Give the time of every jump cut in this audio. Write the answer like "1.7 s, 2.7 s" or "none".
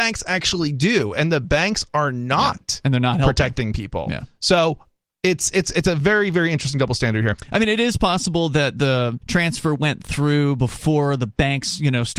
9.2 s